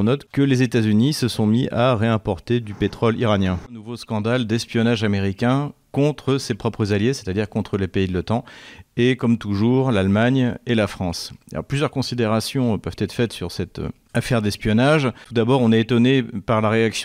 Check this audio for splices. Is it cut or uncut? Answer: uncut